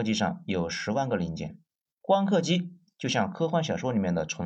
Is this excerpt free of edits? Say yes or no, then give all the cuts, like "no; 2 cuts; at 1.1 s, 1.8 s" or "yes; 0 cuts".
no; 1 cut; at 2.0 s